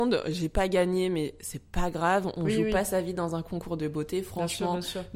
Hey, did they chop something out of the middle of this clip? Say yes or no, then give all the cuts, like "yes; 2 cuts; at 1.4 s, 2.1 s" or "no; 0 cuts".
no; 0 cuts